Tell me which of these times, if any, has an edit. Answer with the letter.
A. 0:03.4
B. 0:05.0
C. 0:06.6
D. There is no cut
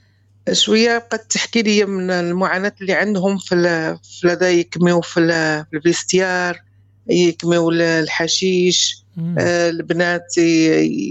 D